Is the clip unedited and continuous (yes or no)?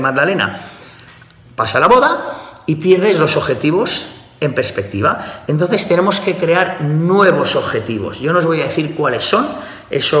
yes